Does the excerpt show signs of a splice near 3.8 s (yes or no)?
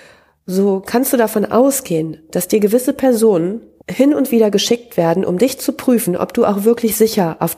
yes